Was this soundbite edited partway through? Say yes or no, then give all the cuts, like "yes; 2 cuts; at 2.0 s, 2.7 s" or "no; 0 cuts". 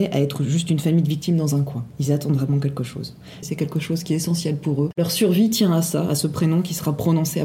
yes; 1 cut; at 3.4 s